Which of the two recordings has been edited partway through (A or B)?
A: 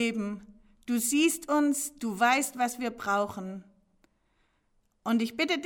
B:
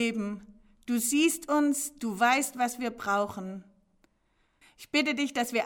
B